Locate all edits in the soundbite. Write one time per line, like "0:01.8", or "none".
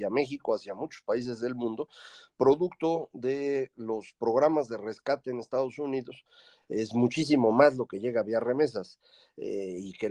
0:06.6